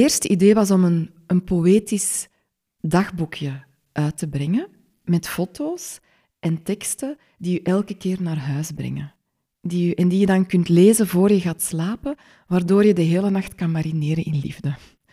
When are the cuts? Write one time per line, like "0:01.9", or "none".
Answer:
none